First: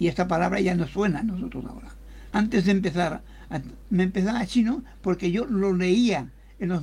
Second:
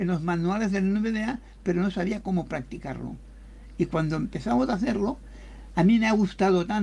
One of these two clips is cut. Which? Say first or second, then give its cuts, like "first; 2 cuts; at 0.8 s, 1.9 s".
first; 2 cuts; at 2.3 s, 3.8 s